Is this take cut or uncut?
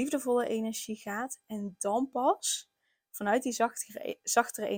uncut